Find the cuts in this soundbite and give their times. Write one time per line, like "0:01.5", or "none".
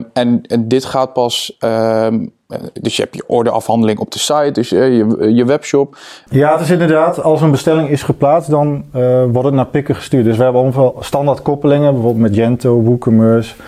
0:06.3